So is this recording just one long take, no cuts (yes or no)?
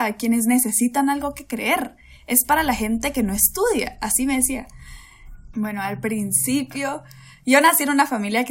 no